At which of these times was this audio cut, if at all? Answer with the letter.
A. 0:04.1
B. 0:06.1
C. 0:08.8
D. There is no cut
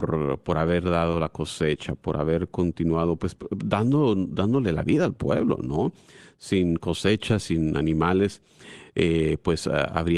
D